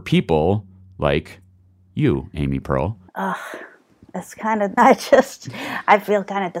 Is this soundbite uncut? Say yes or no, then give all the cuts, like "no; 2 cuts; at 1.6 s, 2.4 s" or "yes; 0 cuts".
no; 2 cuts; at 3.1 s, 4.8 s